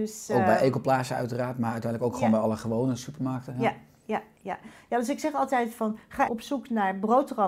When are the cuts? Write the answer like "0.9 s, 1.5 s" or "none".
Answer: 6.3 s